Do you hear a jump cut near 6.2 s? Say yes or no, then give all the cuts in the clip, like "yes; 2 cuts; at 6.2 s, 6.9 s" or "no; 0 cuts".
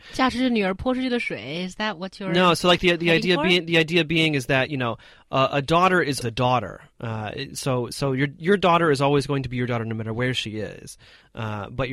yes; 1 cut; at 6.2 s